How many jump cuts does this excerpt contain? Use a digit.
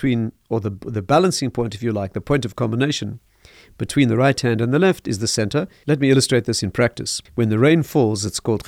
2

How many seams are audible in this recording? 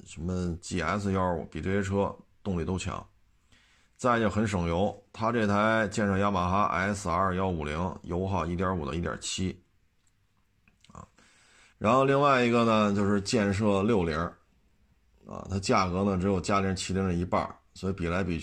1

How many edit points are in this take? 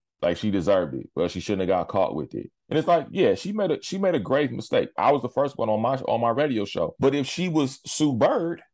1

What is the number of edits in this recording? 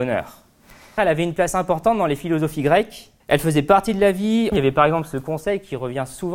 3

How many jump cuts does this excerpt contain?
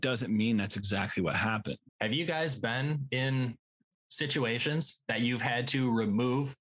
1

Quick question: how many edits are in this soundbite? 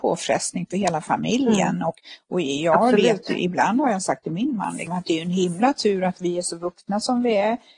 0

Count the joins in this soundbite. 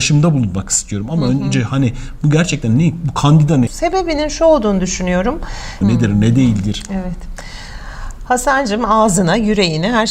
2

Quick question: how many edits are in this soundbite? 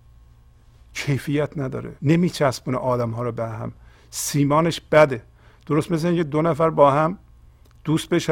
1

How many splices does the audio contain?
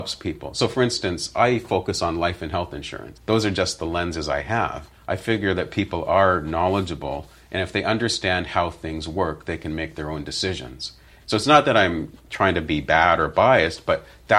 3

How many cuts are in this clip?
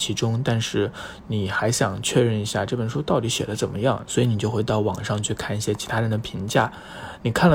1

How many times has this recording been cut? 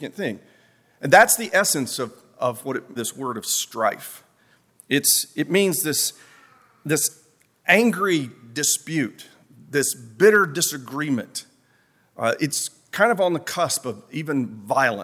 1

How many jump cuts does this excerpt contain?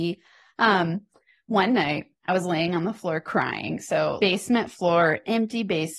1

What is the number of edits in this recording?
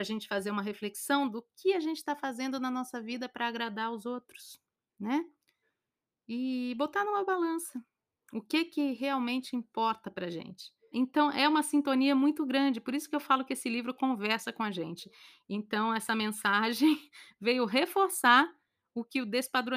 2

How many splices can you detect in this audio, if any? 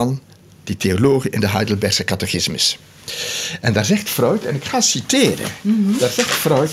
0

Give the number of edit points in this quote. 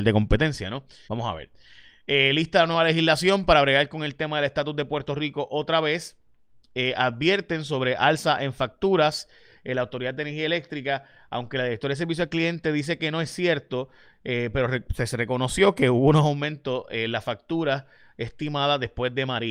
1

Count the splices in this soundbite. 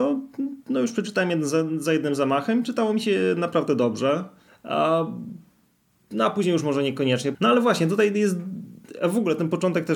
2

